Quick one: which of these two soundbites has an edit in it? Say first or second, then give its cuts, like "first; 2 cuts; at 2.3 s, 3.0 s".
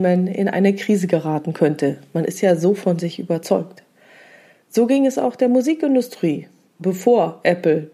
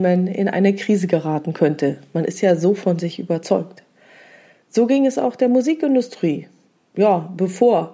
first; 1 cut; at 6.8 s